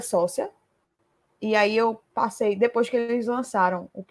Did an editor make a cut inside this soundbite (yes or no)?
no